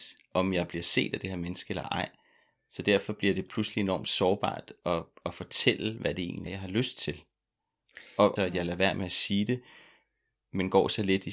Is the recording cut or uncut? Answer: cut